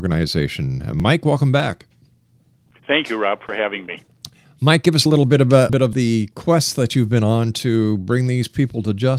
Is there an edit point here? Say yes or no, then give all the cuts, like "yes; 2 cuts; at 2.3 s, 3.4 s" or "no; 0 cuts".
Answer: yes; 1 cut; at 5.7 s